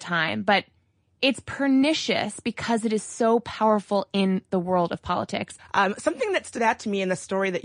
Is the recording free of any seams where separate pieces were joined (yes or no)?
no